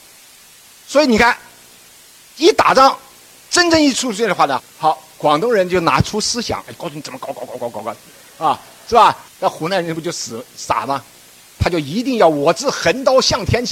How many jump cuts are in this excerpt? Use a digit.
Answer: 3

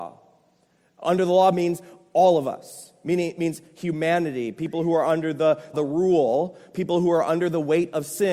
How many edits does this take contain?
1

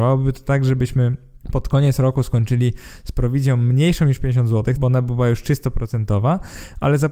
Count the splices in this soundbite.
2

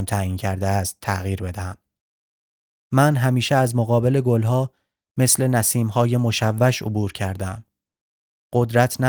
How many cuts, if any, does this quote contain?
1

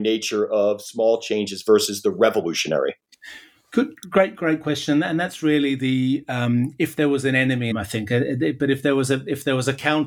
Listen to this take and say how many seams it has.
1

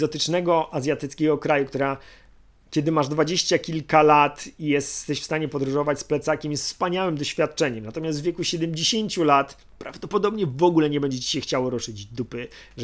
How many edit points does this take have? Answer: 0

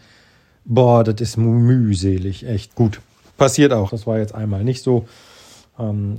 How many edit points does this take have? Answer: 2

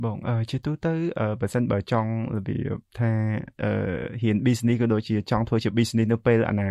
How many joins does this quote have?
1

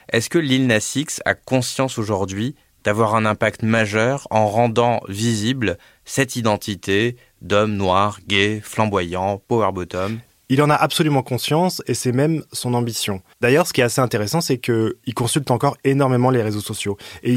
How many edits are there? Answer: 1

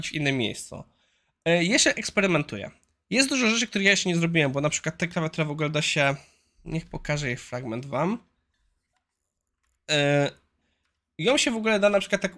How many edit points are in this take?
0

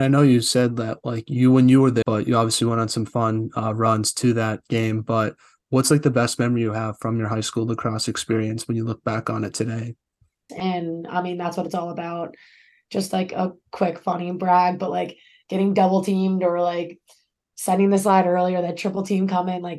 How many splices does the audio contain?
2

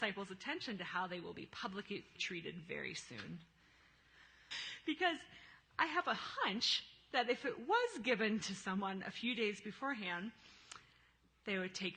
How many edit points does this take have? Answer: 2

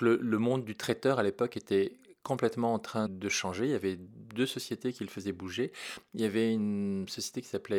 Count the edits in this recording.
1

